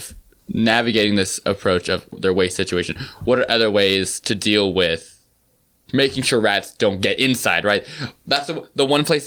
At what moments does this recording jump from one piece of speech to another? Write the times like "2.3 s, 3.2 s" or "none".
2.1 s